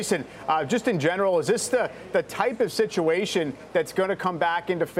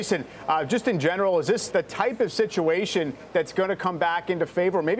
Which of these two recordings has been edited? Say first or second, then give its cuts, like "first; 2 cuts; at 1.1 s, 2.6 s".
second; 1 cut; at 1.7 s